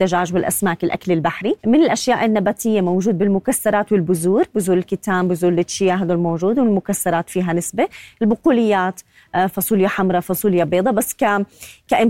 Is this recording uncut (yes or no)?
no